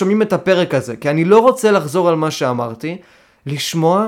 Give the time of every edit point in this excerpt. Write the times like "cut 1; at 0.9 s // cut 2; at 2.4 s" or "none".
none

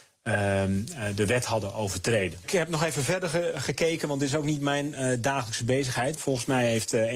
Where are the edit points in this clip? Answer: cut 1; at 6.2 s

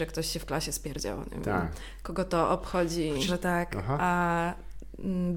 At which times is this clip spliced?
cut 1; at 3.3 s

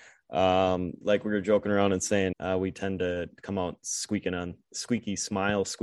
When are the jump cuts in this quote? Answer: cut 1; at 1.0 s // cut 2; at 2.3 s

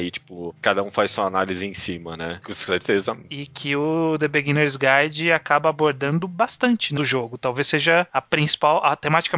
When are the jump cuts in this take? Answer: cut 1; at 2.4 s // cut 2; at 7.0 s

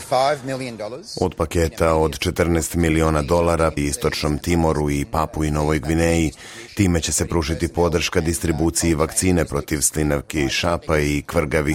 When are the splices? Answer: cut 1; at 3.8 s

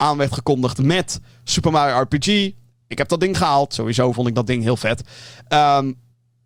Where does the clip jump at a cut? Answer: none

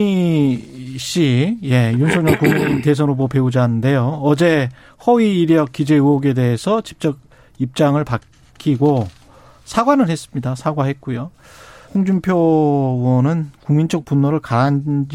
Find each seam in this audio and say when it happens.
cut 1; at 11.9 s

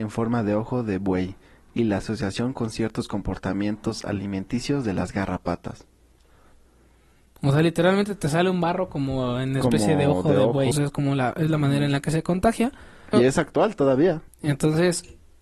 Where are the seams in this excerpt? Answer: cut 1; at 10.7 s // cut 2; at 13.1 s // cut 3; at 14.3 s

